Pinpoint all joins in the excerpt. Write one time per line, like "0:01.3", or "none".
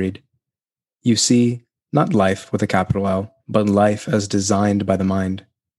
0:01.8
0:03.4